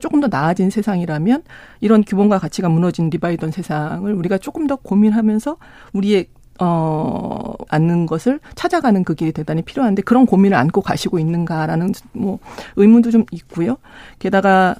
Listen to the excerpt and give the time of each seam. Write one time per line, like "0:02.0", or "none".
0:07.7